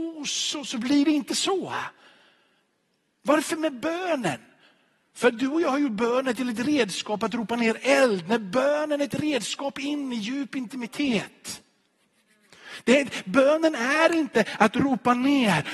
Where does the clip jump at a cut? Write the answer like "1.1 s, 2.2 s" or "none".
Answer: none